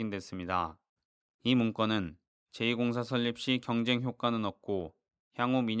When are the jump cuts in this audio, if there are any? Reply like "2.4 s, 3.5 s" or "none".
1.3 s